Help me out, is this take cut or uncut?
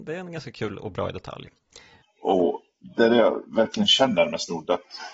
cut